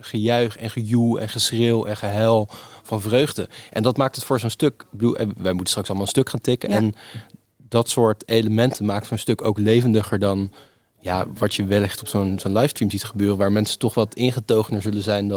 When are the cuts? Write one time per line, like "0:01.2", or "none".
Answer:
none